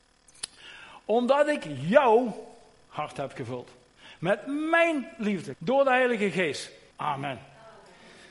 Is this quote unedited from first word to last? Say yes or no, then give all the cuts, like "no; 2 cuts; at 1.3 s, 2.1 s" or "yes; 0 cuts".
no; 2 cuts; at 5.5 s, 6.9 s